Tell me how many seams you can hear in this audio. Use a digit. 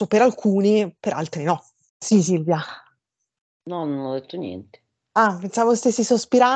1